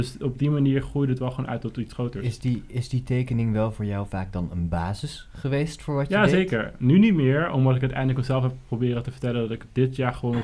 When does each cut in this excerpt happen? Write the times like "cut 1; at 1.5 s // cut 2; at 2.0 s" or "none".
none